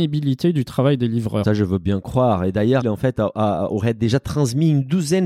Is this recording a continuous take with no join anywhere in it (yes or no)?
no